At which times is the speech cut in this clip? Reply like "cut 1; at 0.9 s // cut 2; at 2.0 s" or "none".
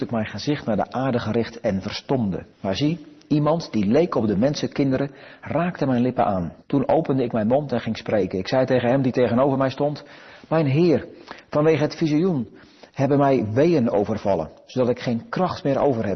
cut 1; at 2.5 s // cut 2; at 6.6 s